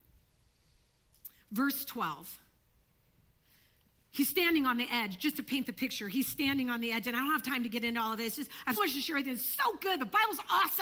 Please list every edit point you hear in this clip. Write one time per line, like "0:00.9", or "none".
0:08.8